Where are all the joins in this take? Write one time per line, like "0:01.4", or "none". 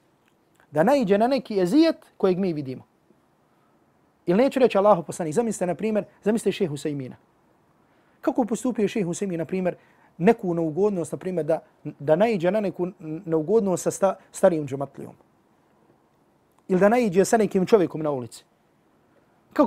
none

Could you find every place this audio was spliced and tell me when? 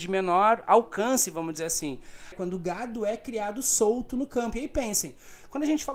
0:02.3

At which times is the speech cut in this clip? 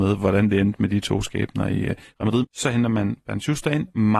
0:02.4

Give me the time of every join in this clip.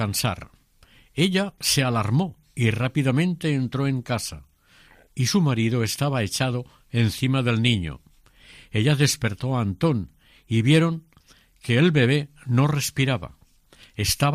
none

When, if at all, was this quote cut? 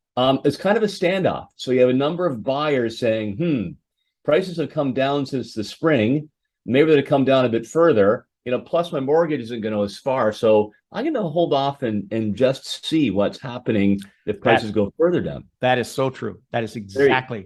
none

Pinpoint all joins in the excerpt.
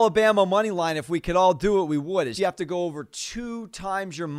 0:02.4

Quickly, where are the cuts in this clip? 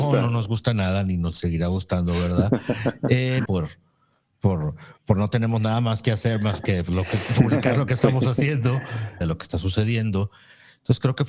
0:03.5
0:09.2

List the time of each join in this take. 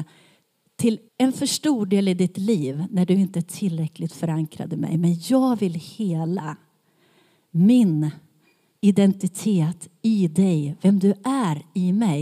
0:01.1

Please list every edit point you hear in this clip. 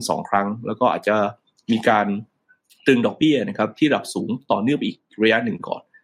none

